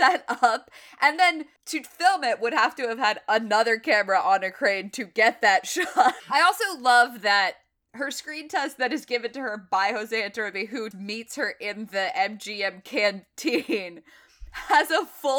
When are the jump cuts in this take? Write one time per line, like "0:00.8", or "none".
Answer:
0:01.6
0:06.2
0:10.9